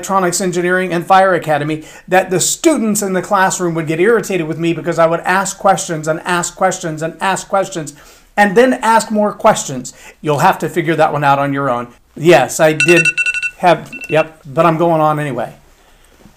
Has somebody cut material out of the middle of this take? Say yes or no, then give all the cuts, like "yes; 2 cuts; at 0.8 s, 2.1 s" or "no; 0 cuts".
yes; 3 cuts; at 10.1 s, 12.0 s, 14.4 s